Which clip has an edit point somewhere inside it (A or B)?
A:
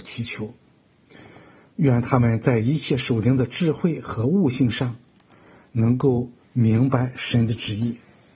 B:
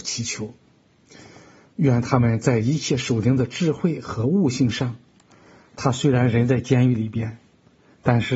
B